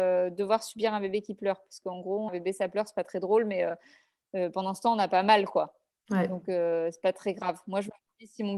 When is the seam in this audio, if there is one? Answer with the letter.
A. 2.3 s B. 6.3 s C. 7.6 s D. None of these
A